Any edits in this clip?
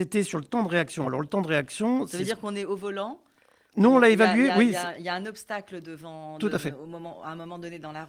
no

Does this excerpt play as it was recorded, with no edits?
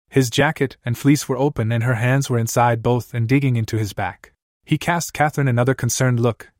no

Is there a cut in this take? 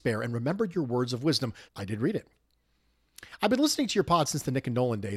yes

